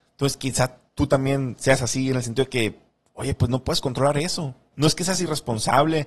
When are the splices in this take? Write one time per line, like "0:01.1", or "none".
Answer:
0:04.7